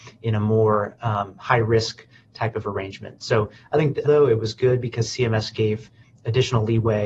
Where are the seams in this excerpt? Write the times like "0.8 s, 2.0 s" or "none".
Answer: 4.0 s

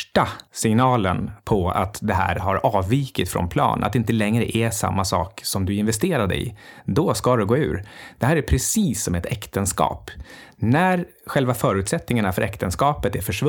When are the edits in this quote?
none

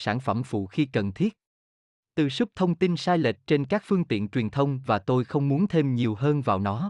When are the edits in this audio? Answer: none

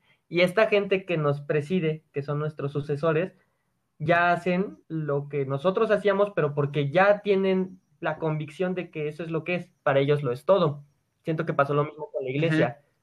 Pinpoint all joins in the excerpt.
4.8 s, 9.8 s

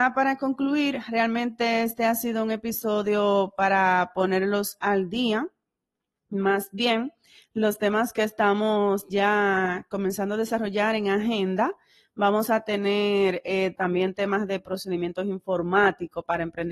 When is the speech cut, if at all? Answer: 13.8 s

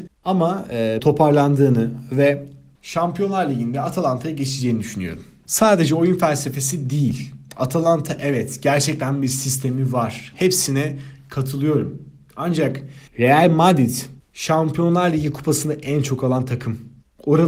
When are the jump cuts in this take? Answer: 1.0 s, 10.3 s, 13.1 s

